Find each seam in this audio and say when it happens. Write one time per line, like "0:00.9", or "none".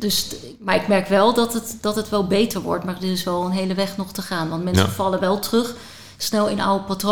none